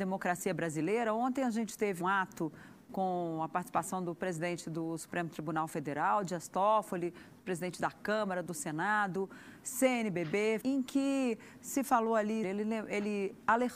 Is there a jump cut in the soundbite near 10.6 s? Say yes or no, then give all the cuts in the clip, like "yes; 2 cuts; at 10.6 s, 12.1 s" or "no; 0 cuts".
yes; 3 cuts; at 2.0 s, 10.6 s, 12.4 s